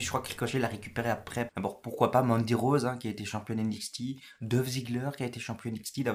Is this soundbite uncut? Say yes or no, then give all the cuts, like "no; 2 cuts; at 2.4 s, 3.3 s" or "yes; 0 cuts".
no; 1 cut; at 1.5 s